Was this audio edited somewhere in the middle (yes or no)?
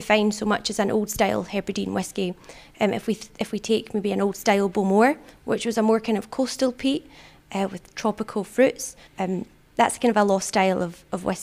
yes